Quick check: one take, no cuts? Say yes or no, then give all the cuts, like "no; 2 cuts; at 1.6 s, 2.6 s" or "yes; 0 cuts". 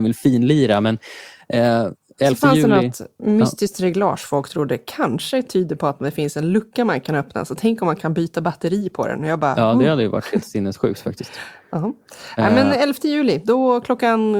yes; 0 cuts